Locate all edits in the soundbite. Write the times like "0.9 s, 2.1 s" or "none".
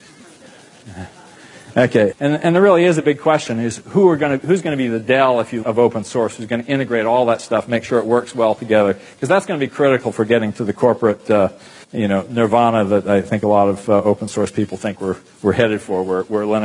2.1 s, 5.6 s, 11.8 s

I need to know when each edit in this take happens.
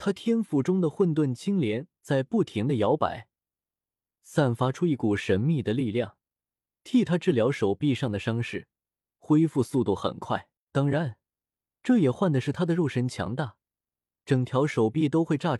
10.7 s, 14.1 s

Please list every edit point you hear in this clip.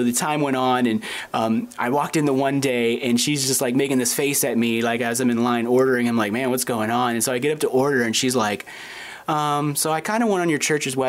none

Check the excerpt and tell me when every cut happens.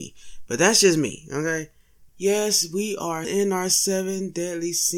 2.1 s, 3.2 s

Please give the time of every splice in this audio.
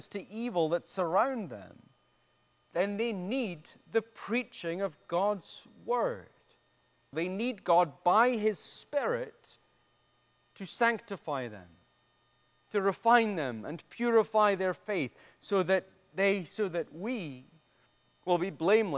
7.1 s

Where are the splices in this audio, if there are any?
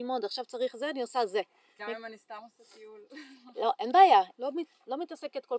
1.8 s, 4.3 s

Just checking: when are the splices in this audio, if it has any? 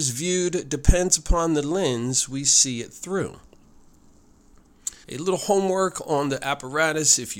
5.0 s

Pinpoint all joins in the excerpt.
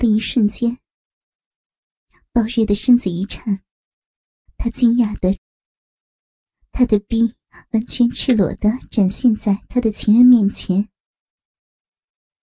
4.5 s

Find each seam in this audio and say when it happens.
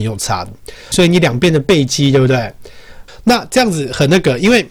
0.9 s, 3.1 s

